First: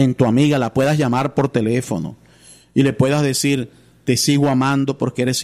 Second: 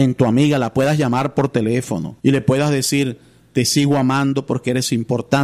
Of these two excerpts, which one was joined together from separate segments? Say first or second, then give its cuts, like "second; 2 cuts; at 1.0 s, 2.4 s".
second; 1 cut; at 2.2 s